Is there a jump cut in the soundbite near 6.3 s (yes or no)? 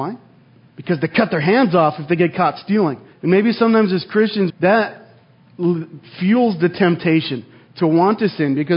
no